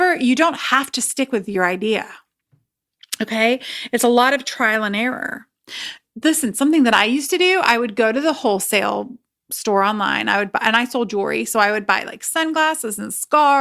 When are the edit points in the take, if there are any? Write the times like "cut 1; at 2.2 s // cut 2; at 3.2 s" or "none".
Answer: none